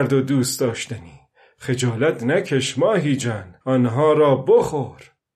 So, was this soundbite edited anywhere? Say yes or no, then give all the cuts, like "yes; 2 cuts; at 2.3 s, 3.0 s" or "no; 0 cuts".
yes; 1 cut; at 3.6 s